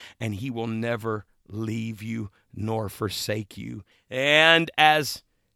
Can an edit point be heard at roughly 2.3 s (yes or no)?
no